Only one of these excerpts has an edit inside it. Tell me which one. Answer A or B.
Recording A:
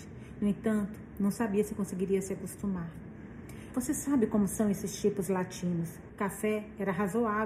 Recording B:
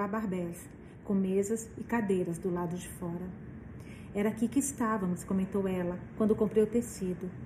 A